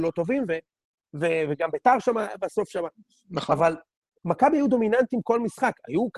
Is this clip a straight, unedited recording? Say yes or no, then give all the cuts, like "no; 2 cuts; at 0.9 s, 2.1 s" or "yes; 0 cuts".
yes; 0 cuts